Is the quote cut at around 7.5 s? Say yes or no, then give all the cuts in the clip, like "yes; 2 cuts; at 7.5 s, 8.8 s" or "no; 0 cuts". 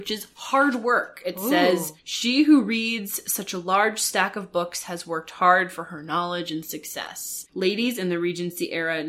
yes; 1 cut; at 7.5 s